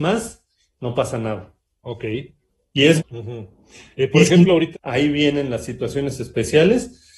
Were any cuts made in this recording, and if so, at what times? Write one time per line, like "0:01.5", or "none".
0:03.0
0:04.7